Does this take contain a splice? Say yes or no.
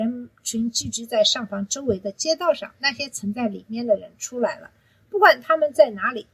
no